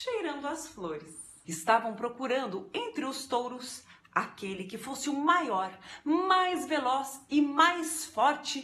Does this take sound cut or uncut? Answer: cut